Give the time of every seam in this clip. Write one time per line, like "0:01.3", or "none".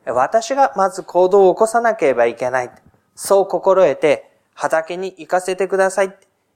none